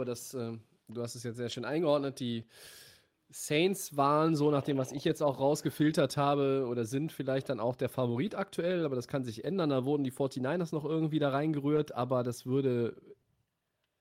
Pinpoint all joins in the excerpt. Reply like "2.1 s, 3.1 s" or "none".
none

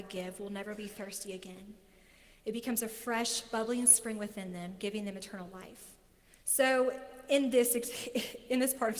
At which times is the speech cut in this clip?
none

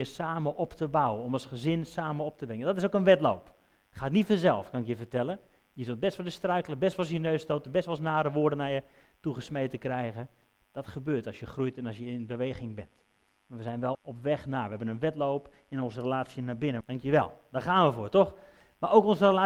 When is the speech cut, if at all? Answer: 13.9 s, 16.8 s

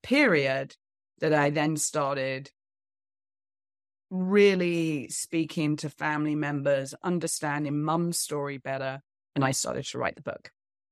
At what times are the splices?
none

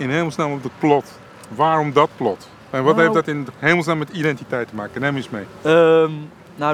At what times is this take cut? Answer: none

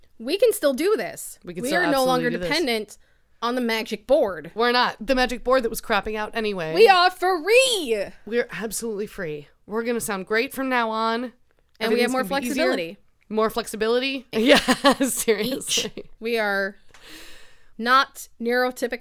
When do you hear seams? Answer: 14.3 s, 16.2 s, 17.7 s

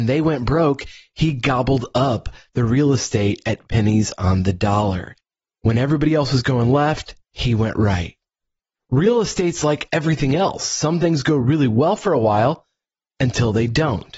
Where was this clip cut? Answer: 7.2 s

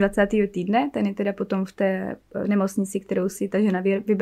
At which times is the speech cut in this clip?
none

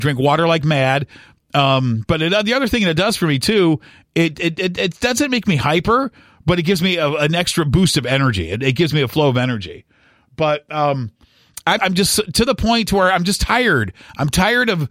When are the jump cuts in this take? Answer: 11.8 s

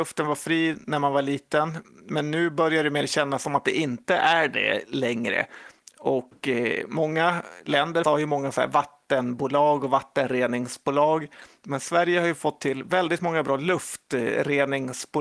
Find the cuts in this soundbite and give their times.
8.0 s

